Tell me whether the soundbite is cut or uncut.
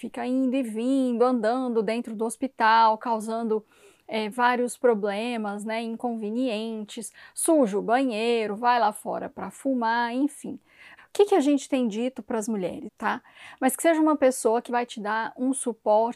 cut